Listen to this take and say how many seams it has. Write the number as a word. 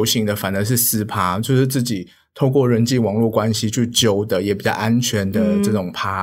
zero